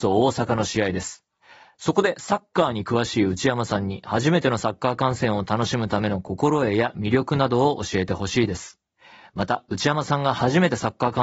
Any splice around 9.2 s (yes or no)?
no